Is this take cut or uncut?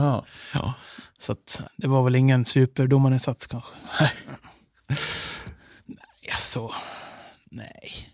cut